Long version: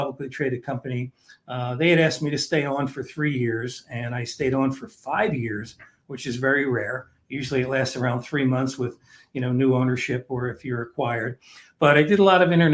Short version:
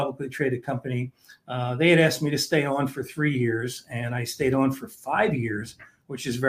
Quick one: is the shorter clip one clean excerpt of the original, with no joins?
yes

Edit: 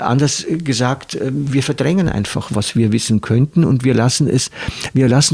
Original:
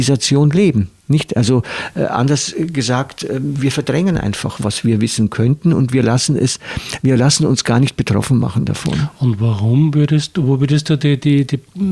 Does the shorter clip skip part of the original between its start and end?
no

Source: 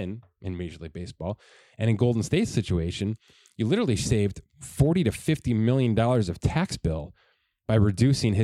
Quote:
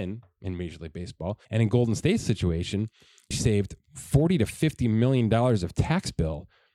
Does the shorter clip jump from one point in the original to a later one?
yes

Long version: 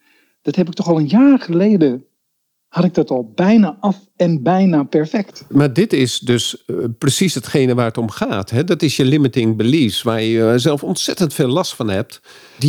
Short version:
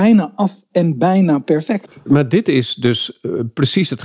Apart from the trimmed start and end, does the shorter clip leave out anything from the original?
no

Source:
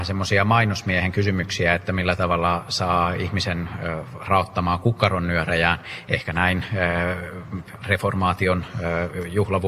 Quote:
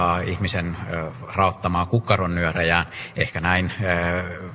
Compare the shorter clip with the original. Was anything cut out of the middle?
no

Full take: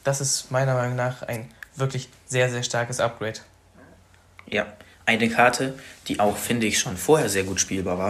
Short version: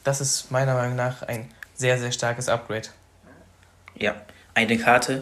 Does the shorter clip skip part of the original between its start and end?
yes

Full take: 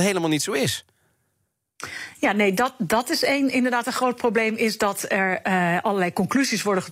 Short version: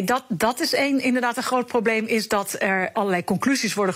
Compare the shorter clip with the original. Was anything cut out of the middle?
yes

